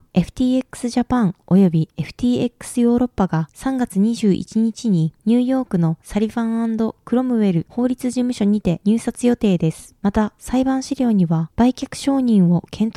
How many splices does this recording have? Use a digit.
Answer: 0